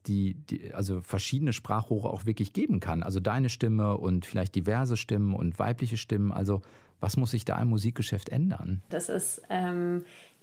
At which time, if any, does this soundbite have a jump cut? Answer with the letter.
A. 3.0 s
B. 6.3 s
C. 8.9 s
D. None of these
C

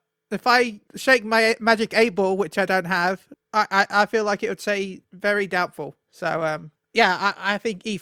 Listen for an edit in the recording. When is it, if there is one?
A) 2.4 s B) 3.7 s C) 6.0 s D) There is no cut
D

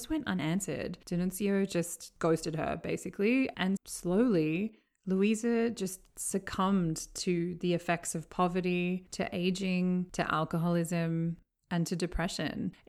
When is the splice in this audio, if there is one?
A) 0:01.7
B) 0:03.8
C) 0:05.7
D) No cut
B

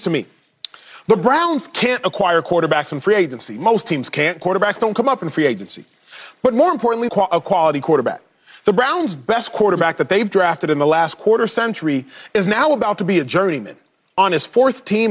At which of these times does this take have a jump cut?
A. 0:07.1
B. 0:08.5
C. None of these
A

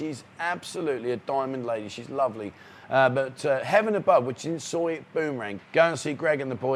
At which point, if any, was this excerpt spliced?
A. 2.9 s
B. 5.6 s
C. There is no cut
B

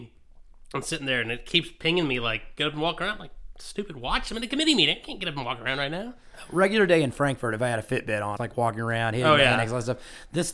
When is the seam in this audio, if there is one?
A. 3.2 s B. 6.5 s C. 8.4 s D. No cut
C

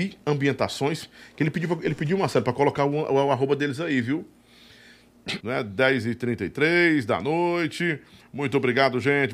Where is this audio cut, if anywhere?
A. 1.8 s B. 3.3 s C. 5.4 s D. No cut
C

